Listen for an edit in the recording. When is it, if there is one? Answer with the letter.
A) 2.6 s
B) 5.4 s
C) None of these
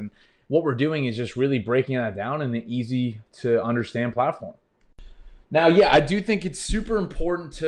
B